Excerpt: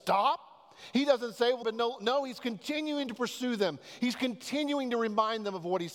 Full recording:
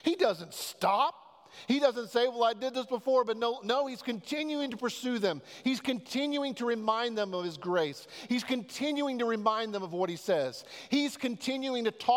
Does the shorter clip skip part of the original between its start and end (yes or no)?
yes